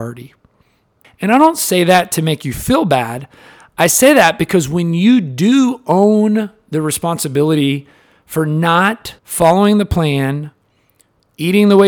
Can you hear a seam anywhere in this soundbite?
yes; 2 cuts; at 1.0 s, 9.2 s

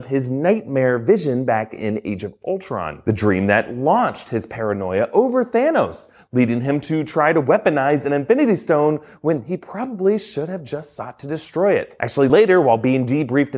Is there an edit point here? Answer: no; 0 cuts

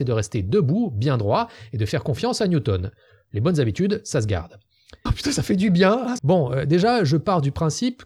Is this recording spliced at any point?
yes; 2 cuts; at 5.1 s, 6.2 s

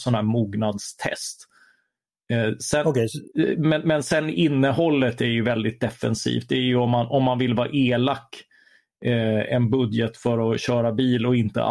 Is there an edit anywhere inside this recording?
no; 0 cuts

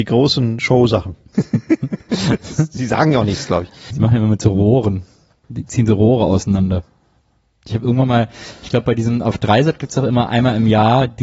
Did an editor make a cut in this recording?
yes; 3 cuts; at 1.3 s, 3.9 s, 5.4 s

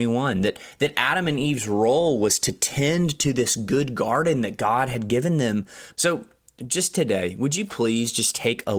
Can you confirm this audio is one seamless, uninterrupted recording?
no; 1 cut; at 5.9 s

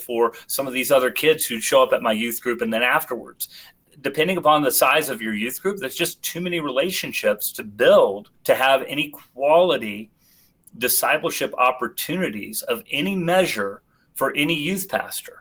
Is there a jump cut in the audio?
yes; 1 cut; at 8.3 s

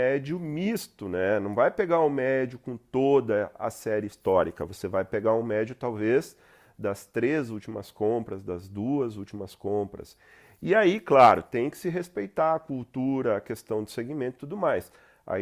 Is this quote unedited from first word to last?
yes; 0 cuts

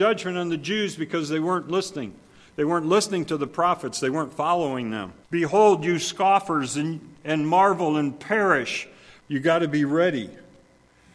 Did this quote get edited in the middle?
yes; 2 cuts; at 5.2 s, 9.2 s

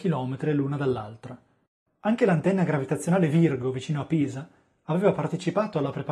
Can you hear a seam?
no; 0 cuts

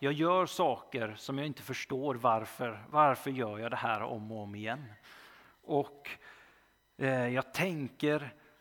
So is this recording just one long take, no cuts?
yes; 0 cuts

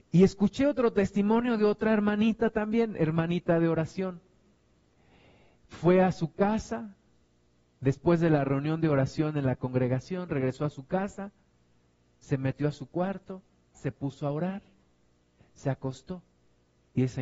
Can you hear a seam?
no; 0 cuts

